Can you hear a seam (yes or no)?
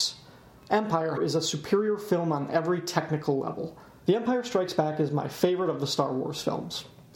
yes